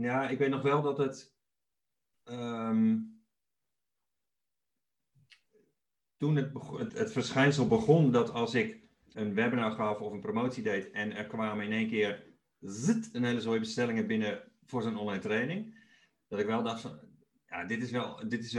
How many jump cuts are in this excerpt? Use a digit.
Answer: 2